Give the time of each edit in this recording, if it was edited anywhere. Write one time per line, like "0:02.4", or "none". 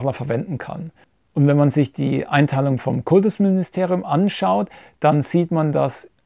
none